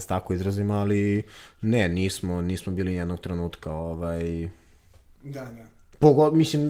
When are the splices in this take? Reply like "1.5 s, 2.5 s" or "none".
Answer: none